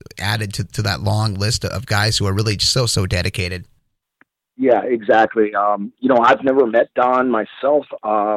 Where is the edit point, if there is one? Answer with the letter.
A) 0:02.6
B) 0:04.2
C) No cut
C